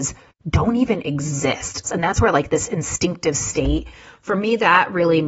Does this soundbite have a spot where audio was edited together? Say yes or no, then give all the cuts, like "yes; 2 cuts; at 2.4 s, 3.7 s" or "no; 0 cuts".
yes; 1 cut; at 1.8 s